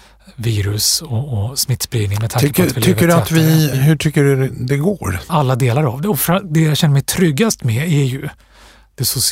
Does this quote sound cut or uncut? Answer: cut